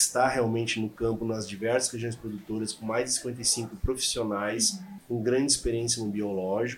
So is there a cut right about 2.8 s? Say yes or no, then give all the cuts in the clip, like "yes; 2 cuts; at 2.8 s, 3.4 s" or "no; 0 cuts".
no; 1 cut; at 5.0 s